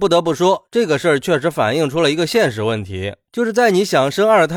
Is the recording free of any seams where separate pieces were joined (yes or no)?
yes